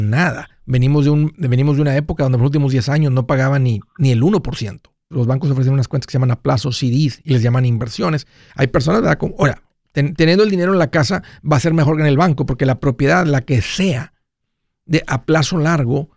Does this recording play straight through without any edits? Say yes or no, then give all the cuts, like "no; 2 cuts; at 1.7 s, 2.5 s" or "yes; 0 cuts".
no; 2 cuts; at 5.1 s, 8.5 s